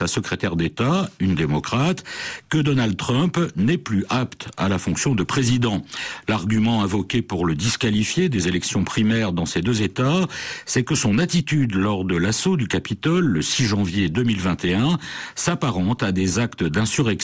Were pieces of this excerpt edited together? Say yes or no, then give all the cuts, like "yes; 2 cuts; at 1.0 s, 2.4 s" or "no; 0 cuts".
no; 0 cuts